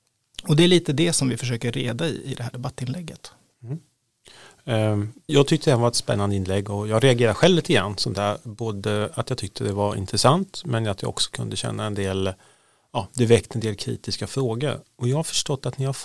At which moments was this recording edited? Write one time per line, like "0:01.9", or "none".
0:05.3